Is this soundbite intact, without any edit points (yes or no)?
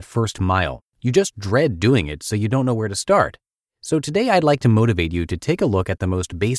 yes